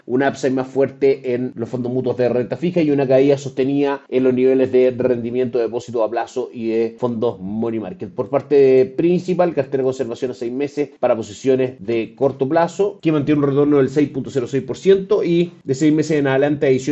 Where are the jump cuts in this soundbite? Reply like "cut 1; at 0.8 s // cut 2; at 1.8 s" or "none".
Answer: none